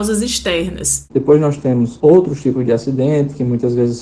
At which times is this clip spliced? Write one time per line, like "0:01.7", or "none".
0:01.1